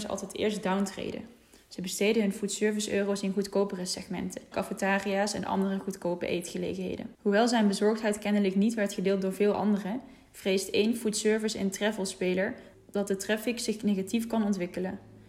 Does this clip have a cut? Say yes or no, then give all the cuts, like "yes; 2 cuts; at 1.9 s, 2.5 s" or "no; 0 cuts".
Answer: yes; 2 cuts; at 4.5 s, 7.1 s